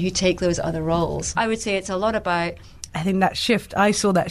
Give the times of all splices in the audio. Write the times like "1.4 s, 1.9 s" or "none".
1.3 s, 2.9 s